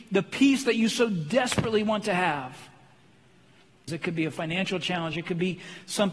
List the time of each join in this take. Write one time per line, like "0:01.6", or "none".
0:03.9
0:05.1